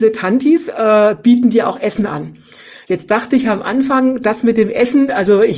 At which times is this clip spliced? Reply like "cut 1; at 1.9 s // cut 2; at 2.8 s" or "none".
none

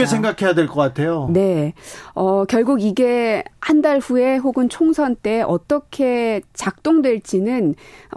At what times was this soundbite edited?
none

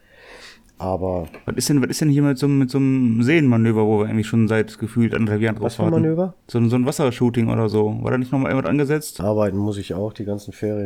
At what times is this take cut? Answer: cut 1; at 6.4 s // cut 2; at 9.2 s

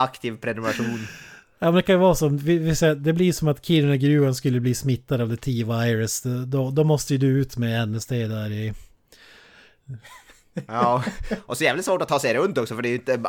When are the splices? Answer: none

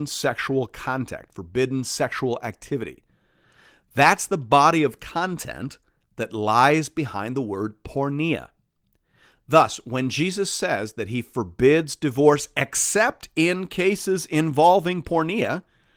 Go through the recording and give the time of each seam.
none

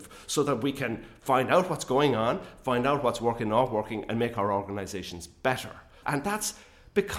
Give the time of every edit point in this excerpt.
cut 1; at 6.0 s

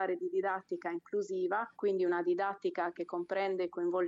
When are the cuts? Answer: cut 1; at 1.7 s

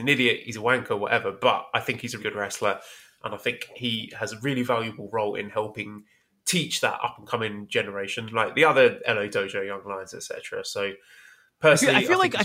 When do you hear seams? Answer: cut 1; at 2.2 s

